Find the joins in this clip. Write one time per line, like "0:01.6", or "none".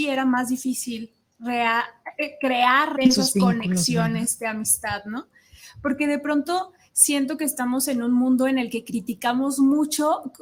0:03.0